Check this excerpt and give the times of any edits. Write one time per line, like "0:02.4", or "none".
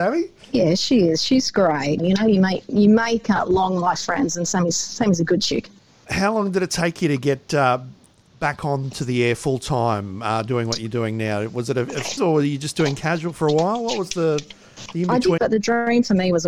0:02.0
0:12.2
0:15.4